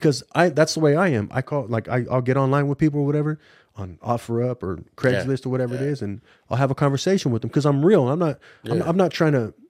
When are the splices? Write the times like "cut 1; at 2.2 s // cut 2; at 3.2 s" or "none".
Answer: none